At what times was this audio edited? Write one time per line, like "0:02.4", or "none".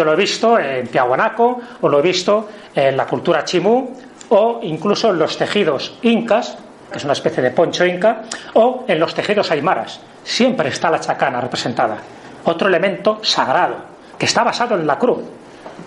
0:06.9
0:14.2